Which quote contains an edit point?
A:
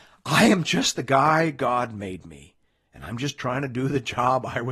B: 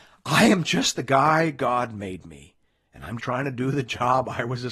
B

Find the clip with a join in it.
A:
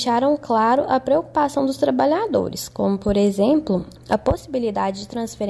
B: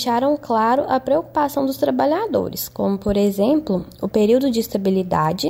A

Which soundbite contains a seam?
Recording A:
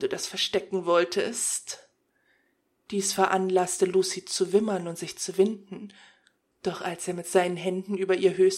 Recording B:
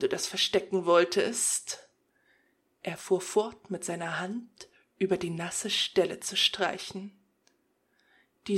A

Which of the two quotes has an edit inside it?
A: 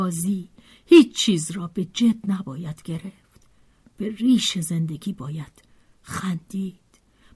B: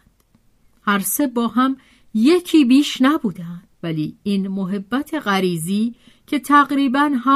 B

